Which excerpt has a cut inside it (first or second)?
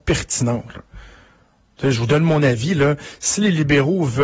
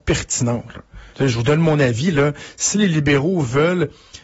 second